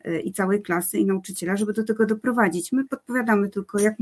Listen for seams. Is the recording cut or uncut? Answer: uncut